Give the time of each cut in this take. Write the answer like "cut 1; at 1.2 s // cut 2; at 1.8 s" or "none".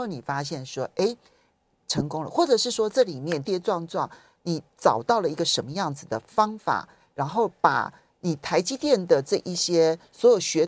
cut 1; at 3.4 s